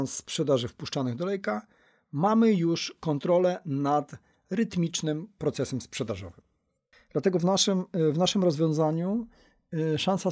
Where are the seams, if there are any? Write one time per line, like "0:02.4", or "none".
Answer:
0:06.9

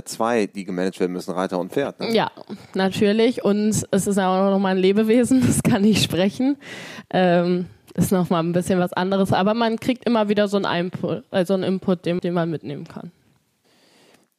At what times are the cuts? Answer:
0:12.2

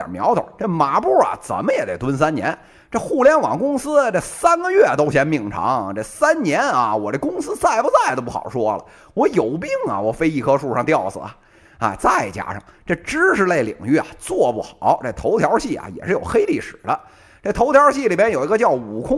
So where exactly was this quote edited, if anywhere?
none

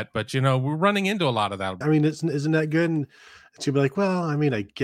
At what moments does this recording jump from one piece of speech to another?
0:01.8

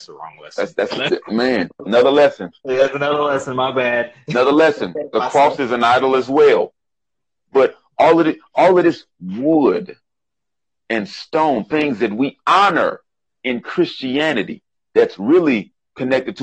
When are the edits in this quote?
0:01.9

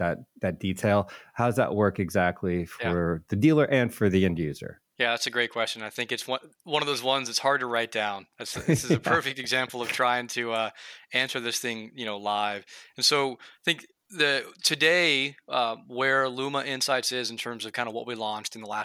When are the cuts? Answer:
none

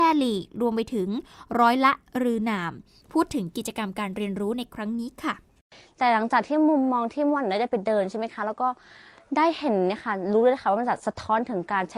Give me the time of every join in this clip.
none

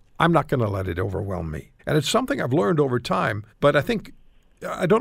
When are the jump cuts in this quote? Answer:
0:01.8
0:03.5

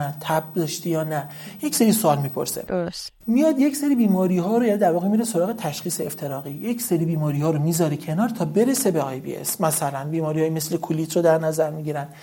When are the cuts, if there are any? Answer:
none

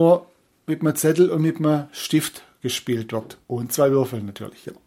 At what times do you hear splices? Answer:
0:03.4

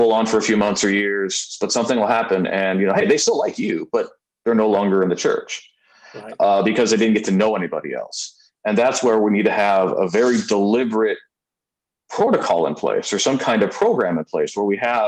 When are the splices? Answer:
none

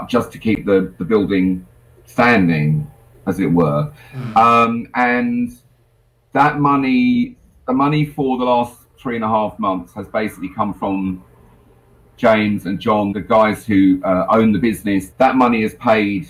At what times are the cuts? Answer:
0:13.1
0:15.1

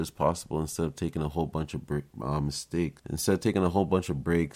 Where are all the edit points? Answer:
0:03.0

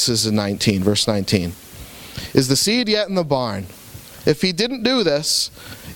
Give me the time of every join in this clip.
0:04.2

